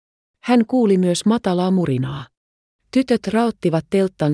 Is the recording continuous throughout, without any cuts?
no; 1 cut; at 2.8 s

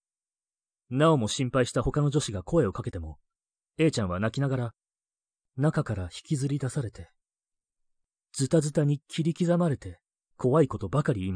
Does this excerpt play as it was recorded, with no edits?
no; 1 cut; at 10.3 s

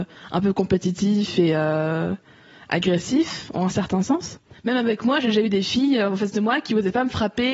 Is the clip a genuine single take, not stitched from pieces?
no; 1 cut; at 4.5 s

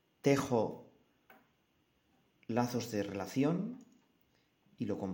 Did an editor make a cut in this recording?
no; 0 cuts

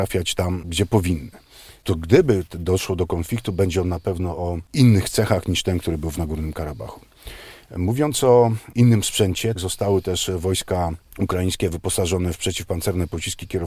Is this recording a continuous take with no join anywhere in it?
no; 2 cuts; at 9.5 s, 11.1 s

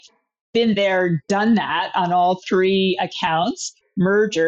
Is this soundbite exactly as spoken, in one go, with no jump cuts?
yes; 0 cuts

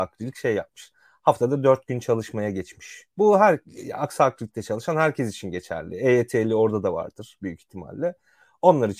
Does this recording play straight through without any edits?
yes; 0 cuts

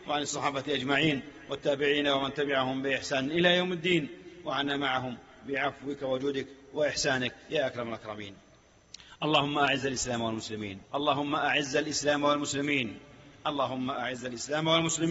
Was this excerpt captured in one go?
no; 1 cut; at 10.9 s

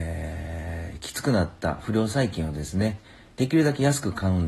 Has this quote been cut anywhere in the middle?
yes; 1 cut; at 3.4 s

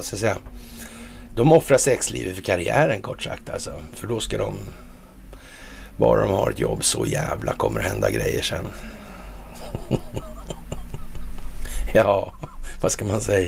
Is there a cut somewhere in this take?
yes; 1 cut; at 1.3 s

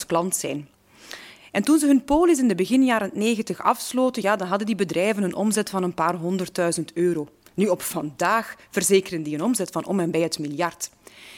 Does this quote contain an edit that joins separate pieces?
no; 0 cuts

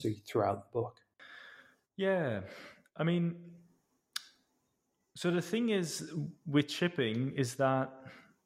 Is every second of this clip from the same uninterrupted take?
yes; 0 cuts

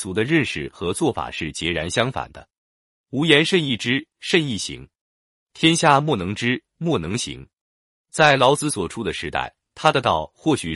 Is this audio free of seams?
yes; 0 cuts

